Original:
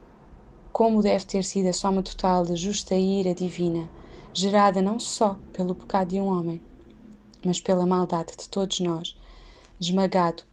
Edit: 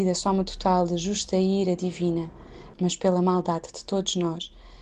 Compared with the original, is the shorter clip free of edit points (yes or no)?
no